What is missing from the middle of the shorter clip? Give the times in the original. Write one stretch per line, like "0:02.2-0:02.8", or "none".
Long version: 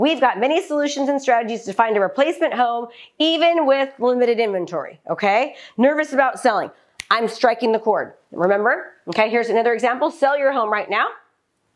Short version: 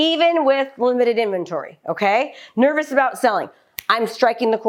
none